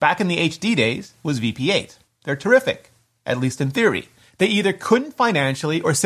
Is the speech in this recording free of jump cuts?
no; 2 cuts; at 2.0 s, 4.3 s

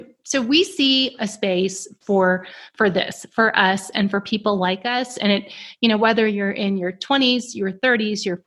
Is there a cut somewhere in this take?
no; 0 cuts

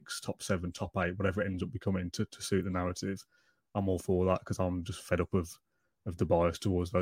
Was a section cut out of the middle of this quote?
no; 0 cuts

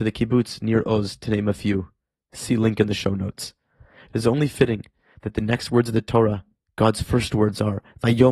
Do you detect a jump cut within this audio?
no; 0 cuts

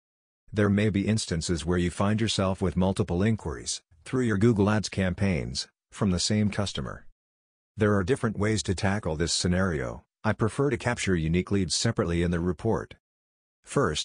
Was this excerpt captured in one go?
yes; 0 cuts

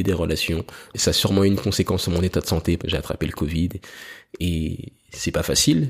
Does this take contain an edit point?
yes; 2 cuts; at 0.9 s, 2.8 s

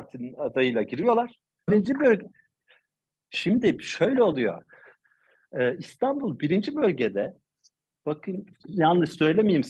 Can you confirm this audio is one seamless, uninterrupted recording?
no; 1 cut; at 1.7 s

